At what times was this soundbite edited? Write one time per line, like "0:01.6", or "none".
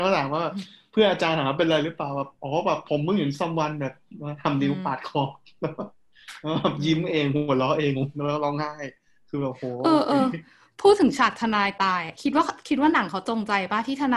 0:07.9